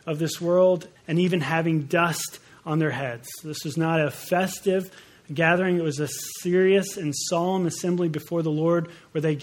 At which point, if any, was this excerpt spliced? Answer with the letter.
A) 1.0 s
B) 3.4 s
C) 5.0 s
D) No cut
A